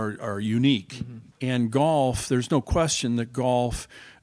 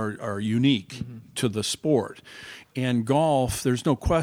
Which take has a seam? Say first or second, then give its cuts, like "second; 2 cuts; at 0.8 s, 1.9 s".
first; 1 cut; at 1.3 s